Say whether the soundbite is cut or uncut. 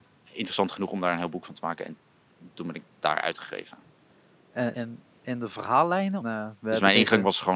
cut